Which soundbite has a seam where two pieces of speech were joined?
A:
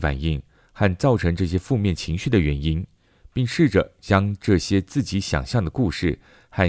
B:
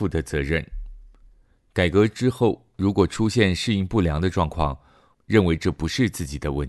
B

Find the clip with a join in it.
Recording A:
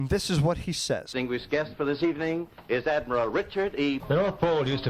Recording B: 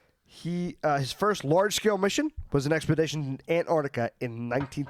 A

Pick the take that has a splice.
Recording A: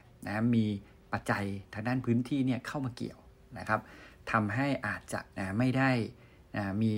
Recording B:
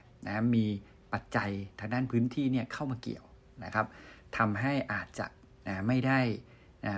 A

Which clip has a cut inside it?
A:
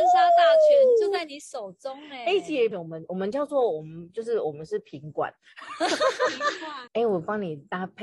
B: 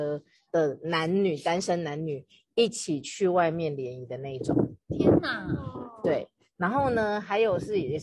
A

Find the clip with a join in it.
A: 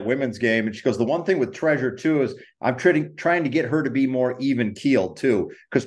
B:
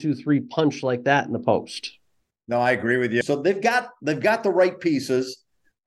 B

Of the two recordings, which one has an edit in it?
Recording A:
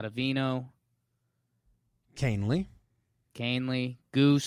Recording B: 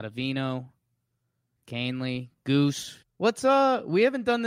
B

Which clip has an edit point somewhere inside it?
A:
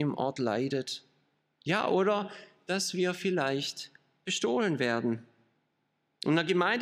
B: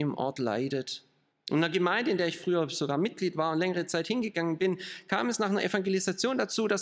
B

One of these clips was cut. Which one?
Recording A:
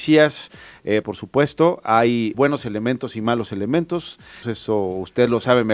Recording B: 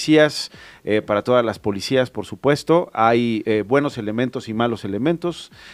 A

